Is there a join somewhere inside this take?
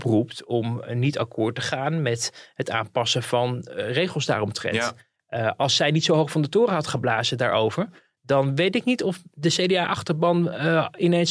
no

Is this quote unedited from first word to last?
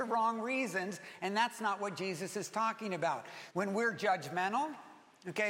no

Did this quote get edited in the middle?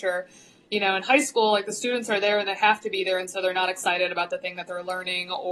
no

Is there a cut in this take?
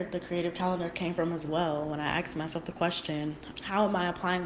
yes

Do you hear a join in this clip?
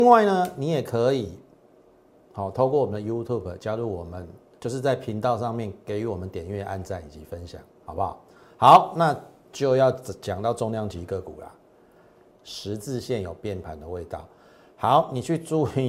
yes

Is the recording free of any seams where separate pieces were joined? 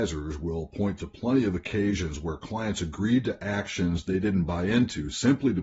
yes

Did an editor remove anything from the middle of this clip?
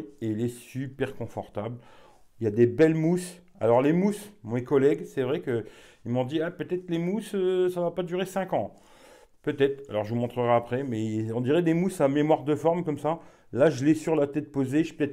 no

